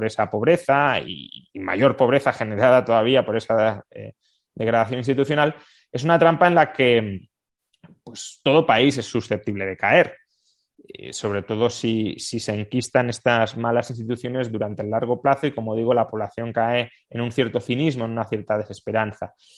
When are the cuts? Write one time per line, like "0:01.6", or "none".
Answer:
none